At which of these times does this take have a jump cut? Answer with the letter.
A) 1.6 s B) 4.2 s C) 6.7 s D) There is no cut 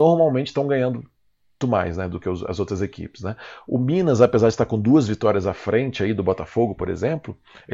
A